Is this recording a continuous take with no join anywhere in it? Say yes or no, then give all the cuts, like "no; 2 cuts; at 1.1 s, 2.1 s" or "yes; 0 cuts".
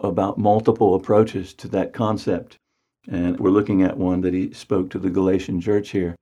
no; 1 cut; at 3.4 s